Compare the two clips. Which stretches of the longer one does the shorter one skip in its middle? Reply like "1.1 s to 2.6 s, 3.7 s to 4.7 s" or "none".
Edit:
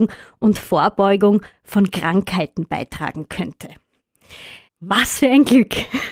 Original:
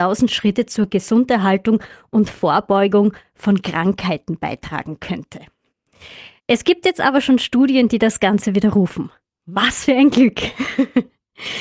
6.4 s to 9.4 s